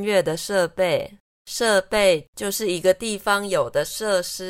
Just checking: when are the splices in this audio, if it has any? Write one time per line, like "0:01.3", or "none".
0:01.2